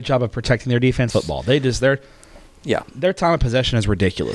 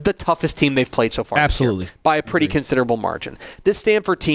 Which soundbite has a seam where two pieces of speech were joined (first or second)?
first